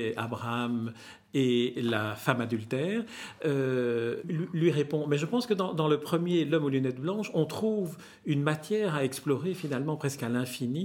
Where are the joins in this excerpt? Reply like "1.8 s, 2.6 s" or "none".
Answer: 4.2 s